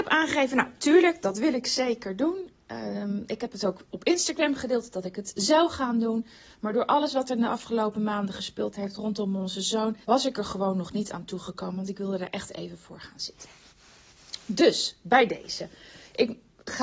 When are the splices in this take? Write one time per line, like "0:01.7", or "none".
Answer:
0:10.0